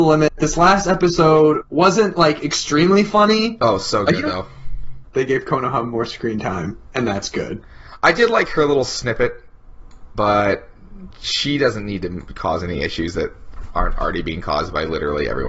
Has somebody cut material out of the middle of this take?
yes; 2 cuts; at 5.0 s, 10.1 s

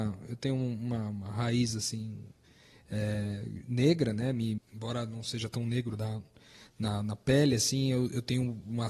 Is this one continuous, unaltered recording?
no; 1 cut; at 4.6 s

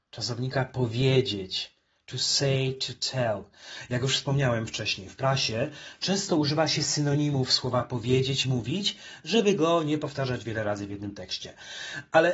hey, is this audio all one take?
yes; 0 cuts

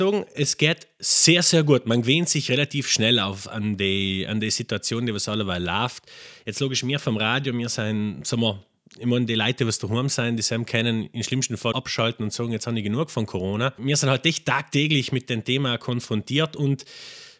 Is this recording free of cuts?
no; 2 cuts; at 11.7 s, 13.8 s

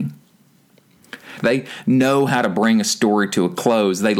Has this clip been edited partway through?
yes; 1 cut; at 1.4 s

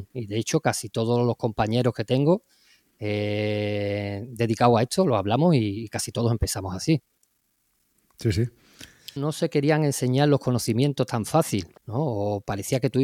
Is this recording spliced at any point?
yes; 2 cuts; at 9.2 s, 11.8 s

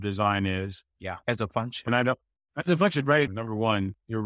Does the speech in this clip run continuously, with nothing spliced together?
no; 2 cuts; at 1.2 s, 3.3 s

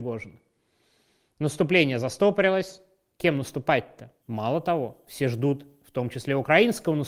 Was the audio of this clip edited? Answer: yes; 1 cut; at 4.2 s

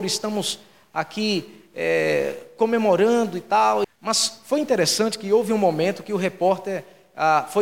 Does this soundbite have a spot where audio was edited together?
yes; 1 cut; at 3.8 s

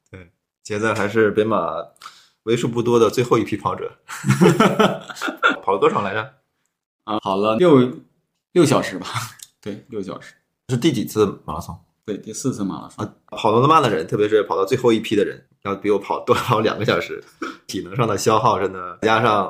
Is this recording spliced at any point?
yes; 2 cuts; at 13.3 s, 15.5 s

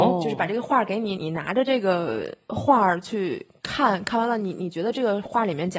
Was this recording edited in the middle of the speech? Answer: yes; 1 cut; at 1.1 s

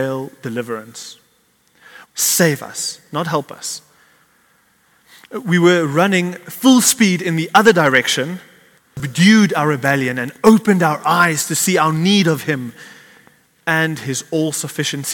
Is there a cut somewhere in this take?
yes; 2 cuts; at 2.0 s, 8.8 s

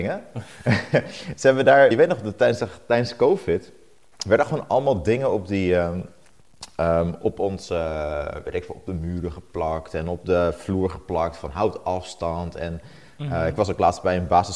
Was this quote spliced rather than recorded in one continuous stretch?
yes; 1 cut; at 1.9 s

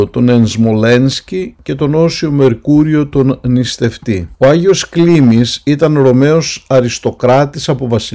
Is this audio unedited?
yes; 0 cuts

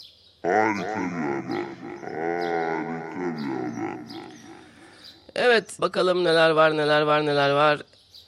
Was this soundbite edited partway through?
yes; 1 cut; at 5.8 s

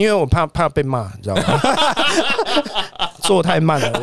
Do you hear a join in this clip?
no; 0 cuts

